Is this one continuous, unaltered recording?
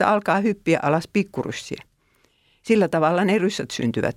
yes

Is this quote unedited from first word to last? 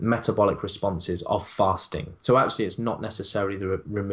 yes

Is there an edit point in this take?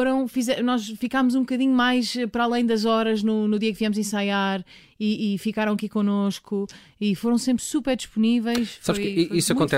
no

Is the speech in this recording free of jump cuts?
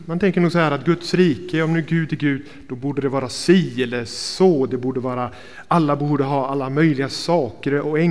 yes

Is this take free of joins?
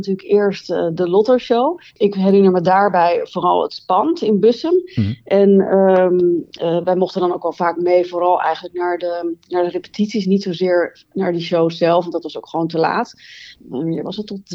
no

